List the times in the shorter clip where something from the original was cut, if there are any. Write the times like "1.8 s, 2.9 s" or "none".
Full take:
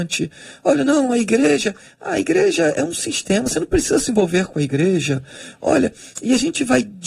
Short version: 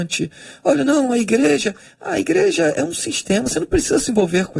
none